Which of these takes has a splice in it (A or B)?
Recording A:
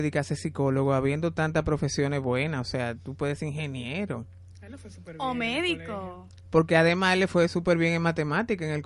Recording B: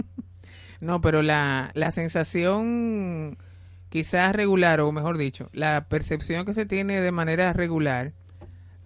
B